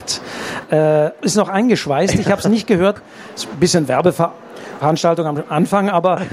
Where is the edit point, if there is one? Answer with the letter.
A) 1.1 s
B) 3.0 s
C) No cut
B